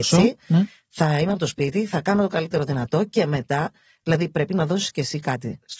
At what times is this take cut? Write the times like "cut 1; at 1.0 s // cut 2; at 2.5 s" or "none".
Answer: none